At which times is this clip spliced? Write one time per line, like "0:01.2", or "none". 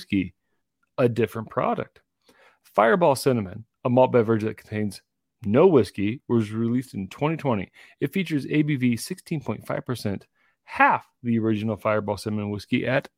none